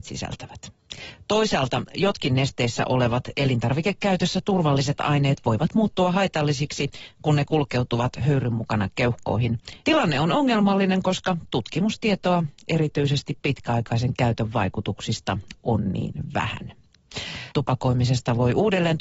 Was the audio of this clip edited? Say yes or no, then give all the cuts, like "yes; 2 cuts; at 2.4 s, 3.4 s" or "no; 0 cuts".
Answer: yes; 2 cuts; at 9.8 s, 17.5 s